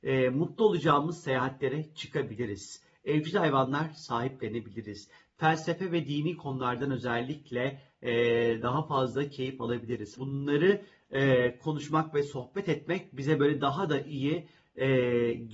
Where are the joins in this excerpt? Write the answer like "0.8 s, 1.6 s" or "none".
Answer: 10.2 s